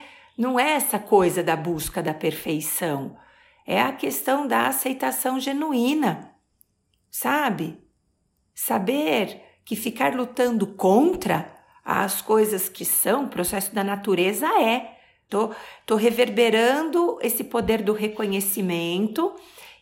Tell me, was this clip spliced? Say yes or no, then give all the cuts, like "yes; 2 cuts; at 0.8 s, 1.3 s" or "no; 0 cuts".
yes; 2 cuts; at 12.8 s, 15.3 s